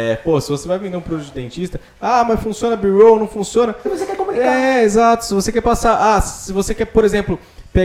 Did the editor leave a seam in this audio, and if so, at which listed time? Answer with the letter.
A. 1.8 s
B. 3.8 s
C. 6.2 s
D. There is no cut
B